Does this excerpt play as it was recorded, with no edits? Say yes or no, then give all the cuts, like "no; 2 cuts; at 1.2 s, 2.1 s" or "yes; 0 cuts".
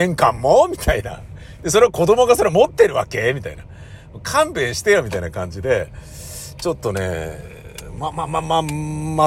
yes; 0 cuts